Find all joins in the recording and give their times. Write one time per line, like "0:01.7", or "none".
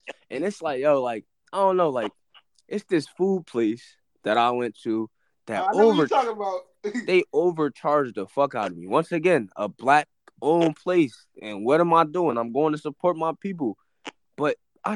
none